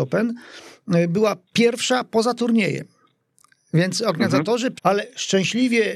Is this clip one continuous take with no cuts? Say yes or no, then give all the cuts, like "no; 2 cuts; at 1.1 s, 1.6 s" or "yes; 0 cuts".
no; 1 cut; at 4.8 s